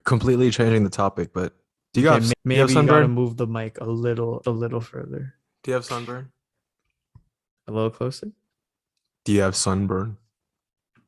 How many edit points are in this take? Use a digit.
2